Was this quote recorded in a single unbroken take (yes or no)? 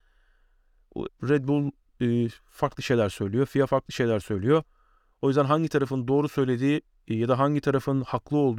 no